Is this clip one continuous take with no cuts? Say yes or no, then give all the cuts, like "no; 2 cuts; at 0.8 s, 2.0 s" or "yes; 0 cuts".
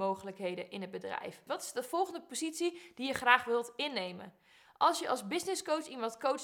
no; 2 cuts; at 1.5 s, 4.7 s